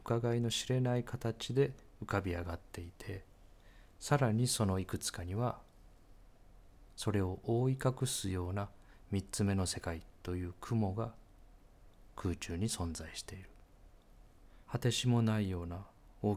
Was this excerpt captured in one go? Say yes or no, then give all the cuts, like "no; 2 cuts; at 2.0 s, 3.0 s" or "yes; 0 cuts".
no; 1 cut; at 14.7 s